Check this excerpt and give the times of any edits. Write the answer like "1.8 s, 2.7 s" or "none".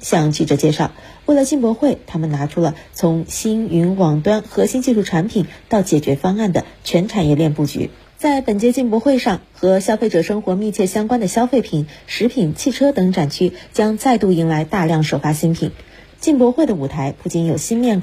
8.0 s, 16.1 s